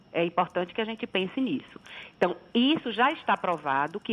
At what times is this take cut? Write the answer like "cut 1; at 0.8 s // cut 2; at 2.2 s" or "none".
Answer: none